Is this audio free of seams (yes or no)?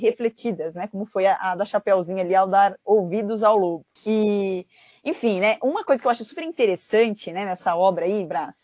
no